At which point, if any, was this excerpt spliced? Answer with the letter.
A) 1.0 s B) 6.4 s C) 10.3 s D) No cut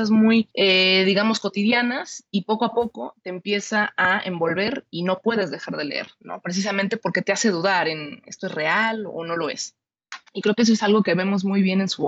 C